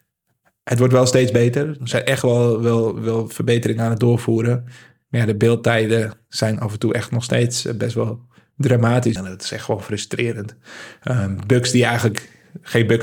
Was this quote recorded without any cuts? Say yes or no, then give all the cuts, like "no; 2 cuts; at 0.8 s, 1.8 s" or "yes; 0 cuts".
no; 1 cut; at 9.2 s